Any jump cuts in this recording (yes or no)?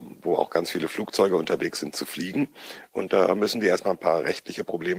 no